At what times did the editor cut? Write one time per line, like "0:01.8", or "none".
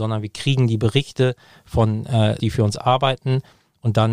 0:02.4